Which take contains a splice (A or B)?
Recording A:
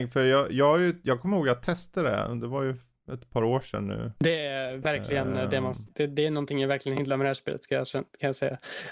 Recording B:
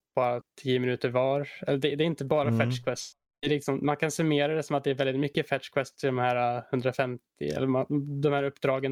A